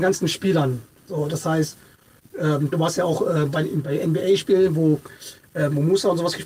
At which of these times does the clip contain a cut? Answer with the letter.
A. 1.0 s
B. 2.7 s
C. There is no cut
B